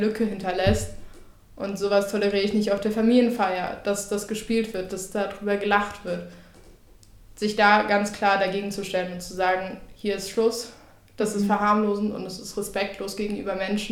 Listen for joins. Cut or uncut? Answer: uncut